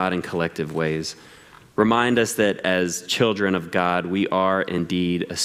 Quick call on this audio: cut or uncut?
uncut